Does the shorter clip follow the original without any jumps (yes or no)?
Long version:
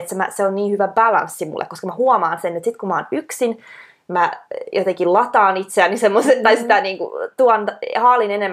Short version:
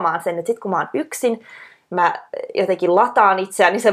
yes